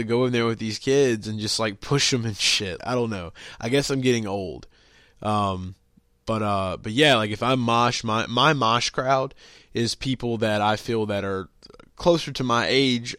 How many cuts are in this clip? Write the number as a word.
one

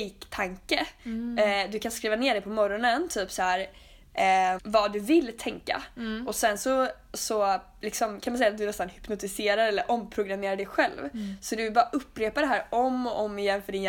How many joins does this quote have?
one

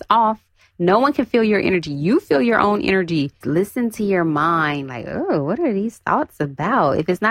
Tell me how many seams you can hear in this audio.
one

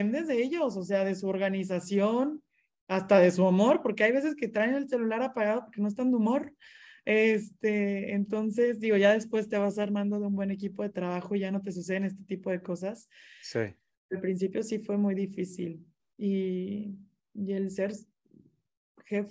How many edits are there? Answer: zero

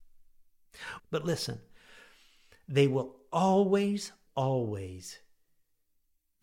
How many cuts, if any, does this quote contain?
two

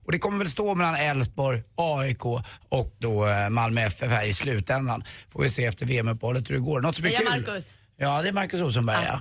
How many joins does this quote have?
one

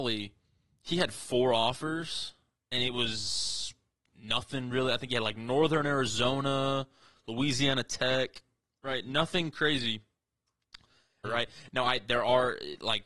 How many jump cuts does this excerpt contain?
one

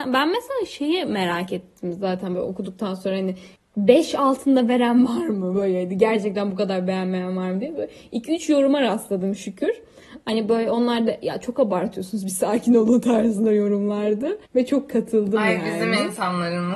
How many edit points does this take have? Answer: one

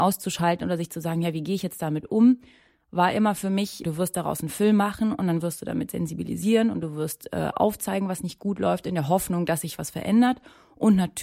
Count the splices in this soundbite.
one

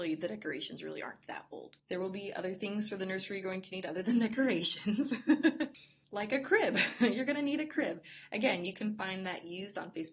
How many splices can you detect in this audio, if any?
one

